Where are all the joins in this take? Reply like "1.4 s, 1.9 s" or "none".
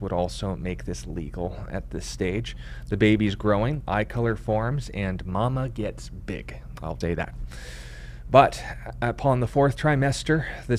3.8 s, 7.0 s